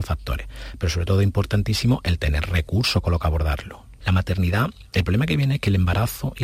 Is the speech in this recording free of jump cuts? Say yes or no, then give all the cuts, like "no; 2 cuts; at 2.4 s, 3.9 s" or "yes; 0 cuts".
no; 1 cut; at 4.0 s